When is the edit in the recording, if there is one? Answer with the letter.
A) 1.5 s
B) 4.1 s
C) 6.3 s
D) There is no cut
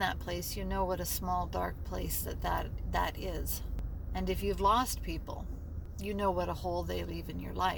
D